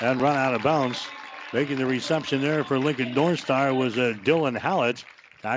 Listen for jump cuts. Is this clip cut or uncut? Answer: uncut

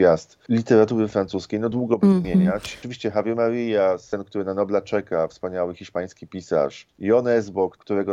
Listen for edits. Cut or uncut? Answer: cut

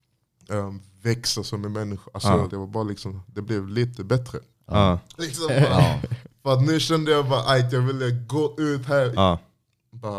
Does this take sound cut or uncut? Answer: cut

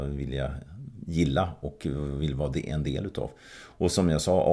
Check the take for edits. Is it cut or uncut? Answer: uncut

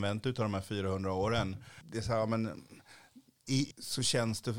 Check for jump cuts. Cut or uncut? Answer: cut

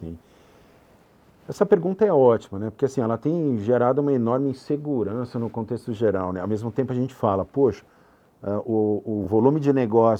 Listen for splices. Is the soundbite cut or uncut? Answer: uncut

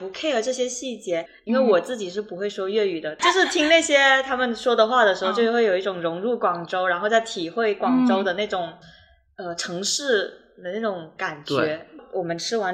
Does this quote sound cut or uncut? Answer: uncut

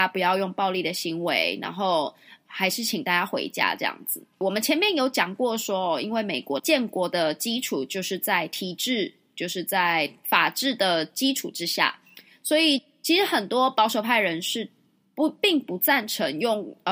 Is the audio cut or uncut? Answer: uncut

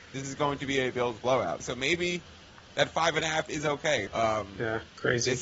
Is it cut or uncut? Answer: cut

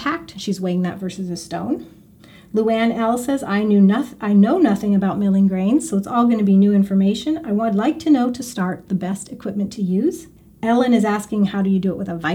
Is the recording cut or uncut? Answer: uncut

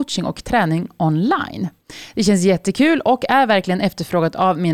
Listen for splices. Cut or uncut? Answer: uncut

